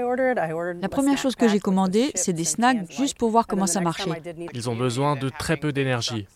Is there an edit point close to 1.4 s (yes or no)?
no